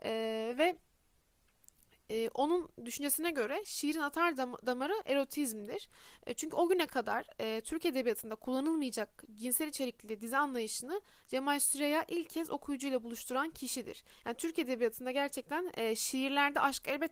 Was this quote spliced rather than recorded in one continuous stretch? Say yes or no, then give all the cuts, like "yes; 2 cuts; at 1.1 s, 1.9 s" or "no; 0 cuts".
no; 0 cuts